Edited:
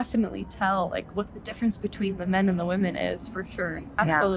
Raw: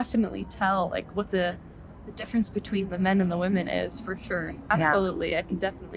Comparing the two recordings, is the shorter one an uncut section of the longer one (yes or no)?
no